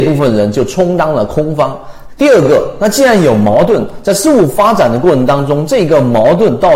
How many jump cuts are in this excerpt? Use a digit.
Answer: 1